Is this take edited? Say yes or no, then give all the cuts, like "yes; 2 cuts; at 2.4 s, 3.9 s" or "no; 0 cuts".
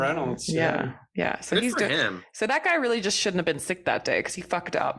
no; 0 cuts